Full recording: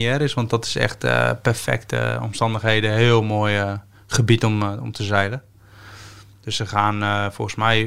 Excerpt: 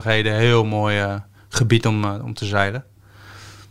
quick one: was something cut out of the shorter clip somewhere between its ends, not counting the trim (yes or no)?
no